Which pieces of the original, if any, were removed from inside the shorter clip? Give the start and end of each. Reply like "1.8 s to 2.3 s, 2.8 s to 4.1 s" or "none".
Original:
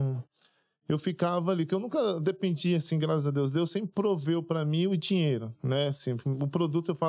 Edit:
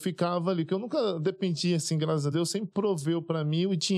3.3 s to 3.5 s